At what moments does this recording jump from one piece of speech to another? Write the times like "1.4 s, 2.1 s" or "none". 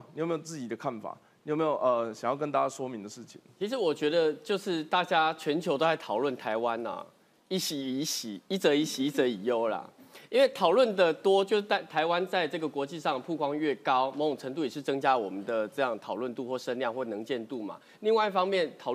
none